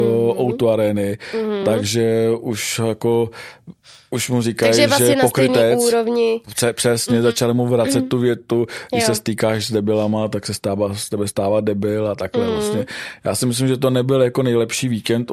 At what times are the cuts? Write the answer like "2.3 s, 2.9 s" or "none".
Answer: none